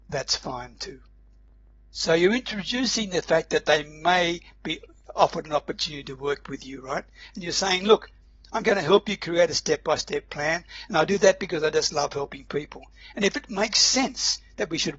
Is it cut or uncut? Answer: uncut